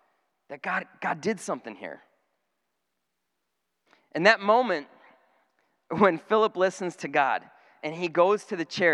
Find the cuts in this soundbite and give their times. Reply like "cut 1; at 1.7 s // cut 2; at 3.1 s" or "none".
none